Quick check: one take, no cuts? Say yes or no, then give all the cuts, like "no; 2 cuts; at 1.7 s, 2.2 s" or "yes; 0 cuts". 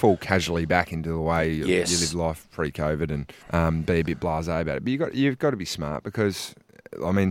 no; 1 cut; at 3.4 s